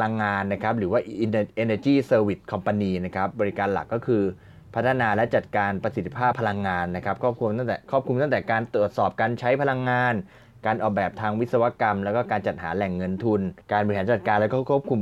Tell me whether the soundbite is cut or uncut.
cut